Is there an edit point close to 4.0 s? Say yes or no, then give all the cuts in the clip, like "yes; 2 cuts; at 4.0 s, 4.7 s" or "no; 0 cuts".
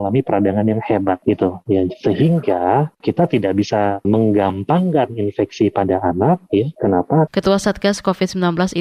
yes; 2 cuts; at 4.0 s, 7.3 s